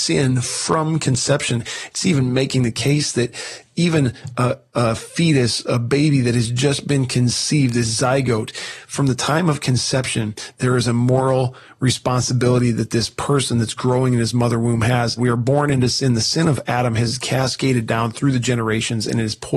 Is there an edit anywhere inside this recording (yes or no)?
yes